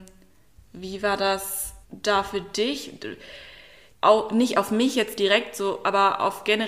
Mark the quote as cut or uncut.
cut